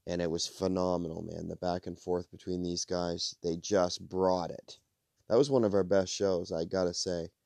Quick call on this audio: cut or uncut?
cut